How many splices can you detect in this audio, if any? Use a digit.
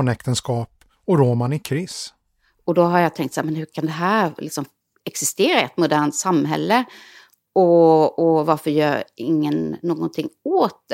0